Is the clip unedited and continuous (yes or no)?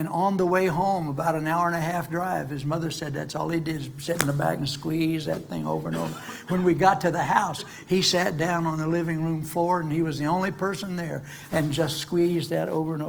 yes